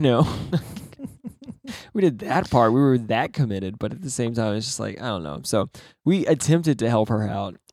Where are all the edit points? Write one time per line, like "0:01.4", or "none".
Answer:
none